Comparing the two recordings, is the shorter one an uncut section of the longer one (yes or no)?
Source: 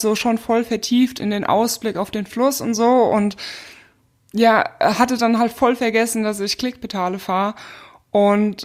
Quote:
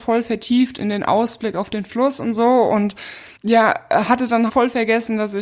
no